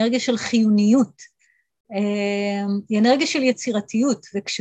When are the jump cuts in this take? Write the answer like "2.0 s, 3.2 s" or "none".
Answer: none